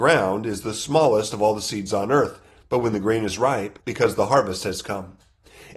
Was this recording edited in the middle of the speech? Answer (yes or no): yes